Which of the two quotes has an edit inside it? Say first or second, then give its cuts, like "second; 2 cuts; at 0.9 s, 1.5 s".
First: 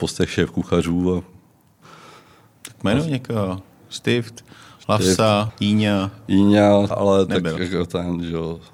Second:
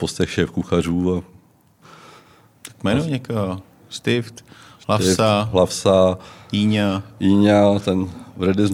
first; 2 cuts; at 5.5 s, 6.9 s